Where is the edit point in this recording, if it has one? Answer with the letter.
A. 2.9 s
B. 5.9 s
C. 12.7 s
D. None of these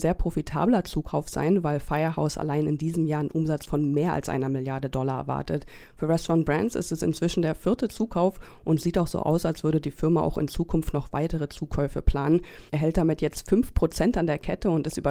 C